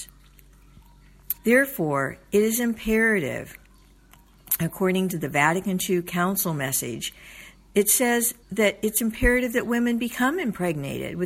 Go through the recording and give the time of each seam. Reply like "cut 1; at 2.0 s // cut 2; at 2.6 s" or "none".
cut 1; at 1.4 s // cut 2; at 8.4 s